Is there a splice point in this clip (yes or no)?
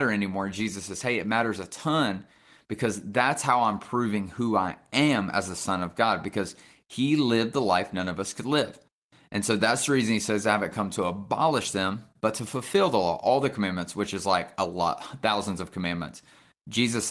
no